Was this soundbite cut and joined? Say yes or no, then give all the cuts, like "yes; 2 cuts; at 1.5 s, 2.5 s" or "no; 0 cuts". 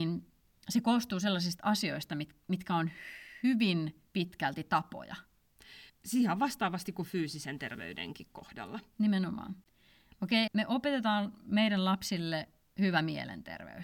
yes; 2 cuts; at 5.9 s, 10.5 s